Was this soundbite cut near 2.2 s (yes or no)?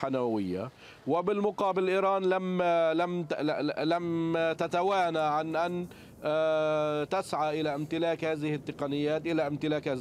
no